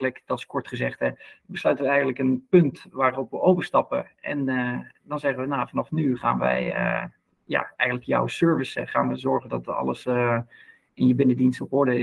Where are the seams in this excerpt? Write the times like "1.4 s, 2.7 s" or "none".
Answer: none